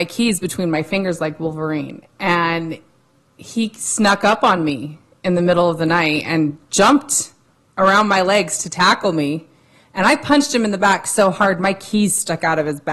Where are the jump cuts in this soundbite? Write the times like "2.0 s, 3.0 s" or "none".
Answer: none